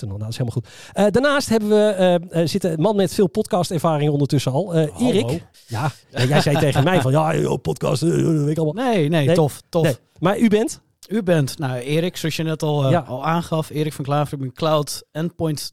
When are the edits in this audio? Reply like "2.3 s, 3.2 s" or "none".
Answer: 5.5 s